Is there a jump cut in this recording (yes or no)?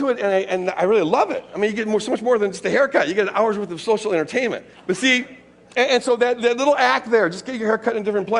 yes